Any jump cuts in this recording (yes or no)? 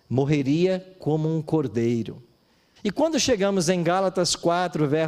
yes